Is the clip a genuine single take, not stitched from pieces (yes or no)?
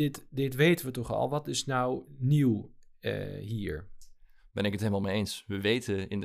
yes